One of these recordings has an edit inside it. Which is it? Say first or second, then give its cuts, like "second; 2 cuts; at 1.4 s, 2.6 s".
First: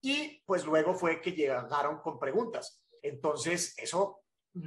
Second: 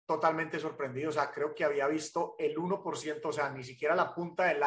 first; 1 cut; at 3.0 s